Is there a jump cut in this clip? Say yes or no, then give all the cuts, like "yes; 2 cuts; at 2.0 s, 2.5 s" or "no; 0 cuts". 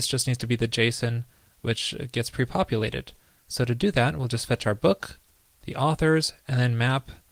no; 0 cuts